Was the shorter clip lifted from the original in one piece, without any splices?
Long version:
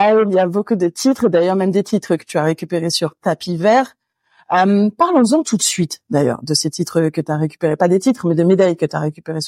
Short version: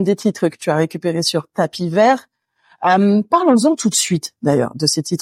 yes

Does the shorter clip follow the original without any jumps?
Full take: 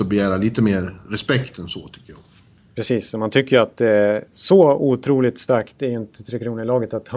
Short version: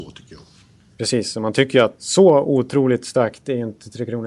no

